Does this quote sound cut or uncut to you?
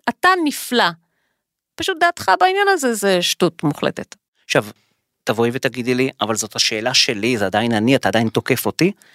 uncut